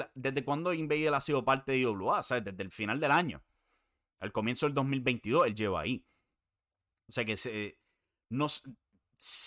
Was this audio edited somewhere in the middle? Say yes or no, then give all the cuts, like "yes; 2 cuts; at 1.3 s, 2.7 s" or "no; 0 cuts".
no; 0 cuts